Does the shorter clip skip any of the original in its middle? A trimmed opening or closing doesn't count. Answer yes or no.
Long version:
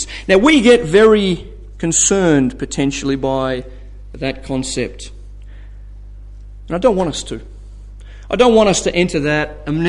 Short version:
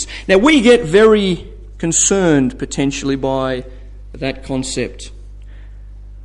no